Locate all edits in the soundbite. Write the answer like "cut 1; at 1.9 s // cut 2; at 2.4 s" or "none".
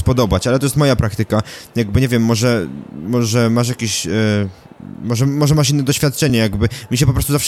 none